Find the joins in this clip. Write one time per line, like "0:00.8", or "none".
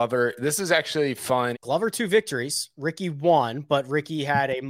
0:01.5